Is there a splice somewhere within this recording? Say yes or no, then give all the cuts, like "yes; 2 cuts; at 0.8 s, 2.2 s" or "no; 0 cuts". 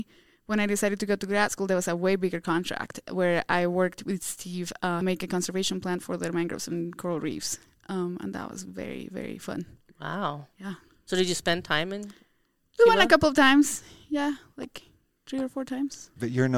yes; 1 cut; at 5.0 s